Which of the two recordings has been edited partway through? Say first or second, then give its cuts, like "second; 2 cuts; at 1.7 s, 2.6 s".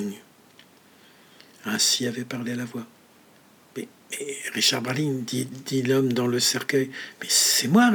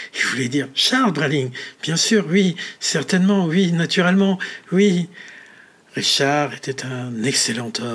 first; 1 cut; at 5.5 s